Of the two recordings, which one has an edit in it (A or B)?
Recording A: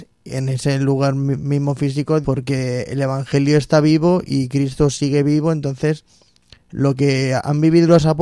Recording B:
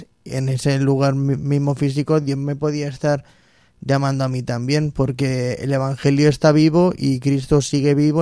A